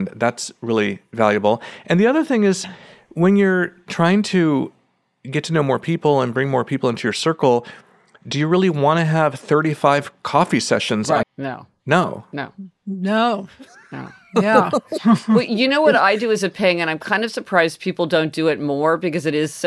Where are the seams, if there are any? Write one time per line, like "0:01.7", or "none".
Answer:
0:11.2